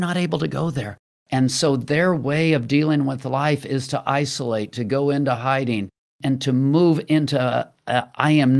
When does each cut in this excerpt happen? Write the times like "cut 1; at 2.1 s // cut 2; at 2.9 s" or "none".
cut 1; at 1.1 s